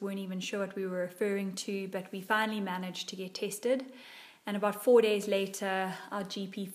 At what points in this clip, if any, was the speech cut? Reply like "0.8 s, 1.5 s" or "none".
none